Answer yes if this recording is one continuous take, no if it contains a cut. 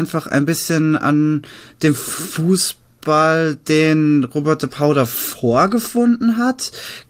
yes